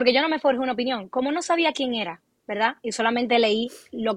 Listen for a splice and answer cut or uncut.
uncut